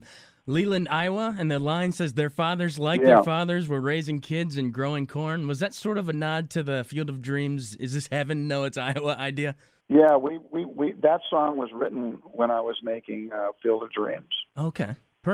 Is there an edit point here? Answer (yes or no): no